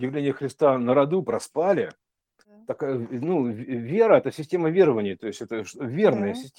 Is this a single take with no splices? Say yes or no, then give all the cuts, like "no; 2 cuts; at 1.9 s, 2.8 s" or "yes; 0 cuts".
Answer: yes; 0 cuts